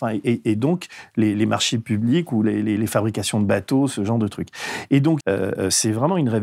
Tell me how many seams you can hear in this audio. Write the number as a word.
one